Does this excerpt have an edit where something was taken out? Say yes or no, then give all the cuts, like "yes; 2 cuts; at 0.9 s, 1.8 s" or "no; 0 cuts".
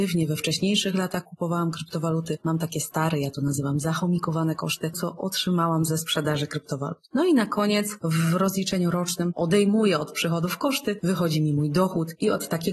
yes; 1 cut; at 4.9 s